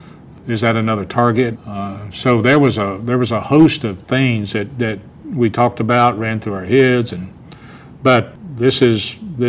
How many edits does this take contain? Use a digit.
1